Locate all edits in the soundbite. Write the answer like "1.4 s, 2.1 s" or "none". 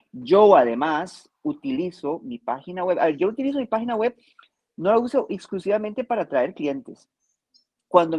none